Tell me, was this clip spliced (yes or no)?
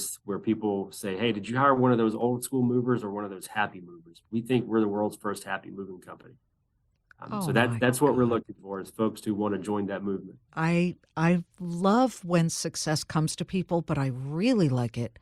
yes